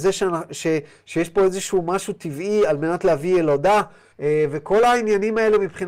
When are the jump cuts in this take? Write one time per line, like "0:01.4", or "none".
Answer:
0:04.1